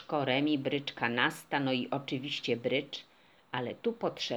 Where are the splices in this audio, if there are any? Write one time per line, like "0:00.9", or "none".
none